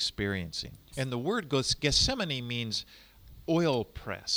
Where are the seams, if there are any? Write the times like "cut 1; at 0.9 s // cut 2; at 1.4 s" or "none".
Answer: cut 1; at 0.9 s

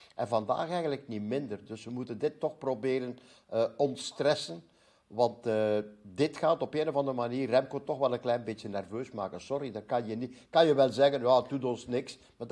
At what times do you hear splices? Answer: none

